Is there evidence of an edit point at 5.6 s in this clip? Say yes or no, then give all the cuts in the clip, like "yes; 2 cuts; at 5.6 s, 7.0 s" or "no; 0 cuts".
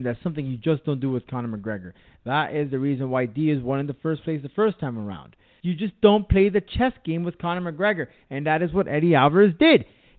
yes; 1 cut; at 5.6 s